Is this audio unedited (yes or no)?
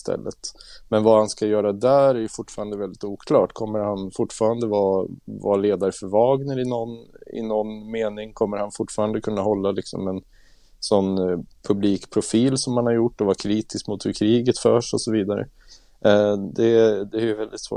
yes